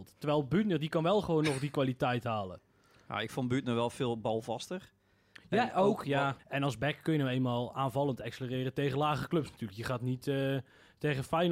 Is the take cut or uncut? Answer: cut